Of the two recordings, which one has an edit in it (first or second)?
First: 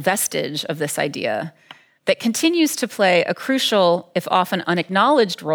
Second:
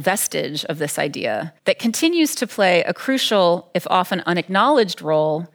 second